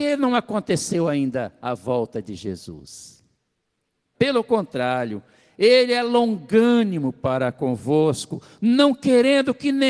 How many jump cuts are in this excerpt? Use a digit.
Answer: 1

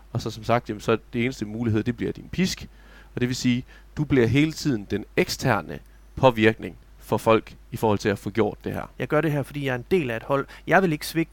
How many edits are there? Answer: 1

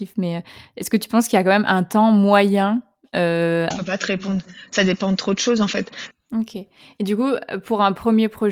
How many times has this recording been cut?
2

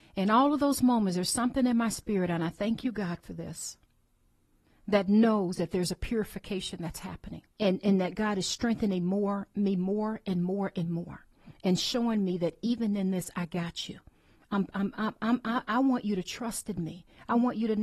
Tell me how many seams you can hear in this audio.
1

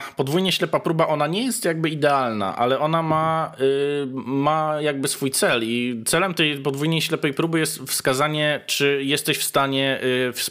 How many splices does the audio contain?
0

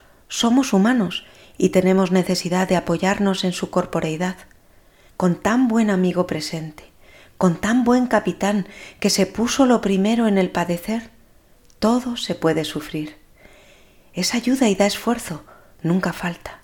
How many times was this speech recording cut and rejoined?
1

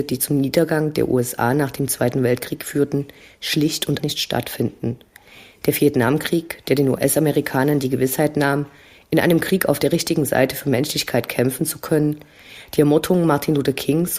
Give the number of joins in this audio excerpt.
1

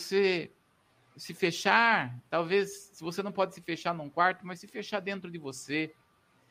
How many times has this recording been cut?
0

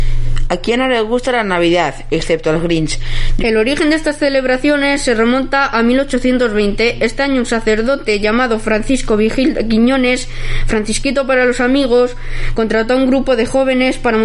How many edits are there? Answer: 1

